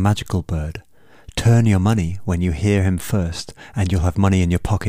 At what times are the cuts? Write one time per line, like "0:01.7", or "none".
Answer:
none